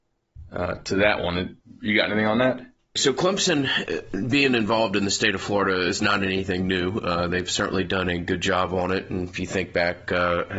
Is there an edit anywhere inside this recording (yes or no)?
no